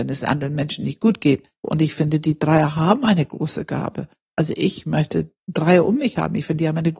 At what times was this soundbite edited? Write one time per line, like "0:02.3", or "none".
0:01.6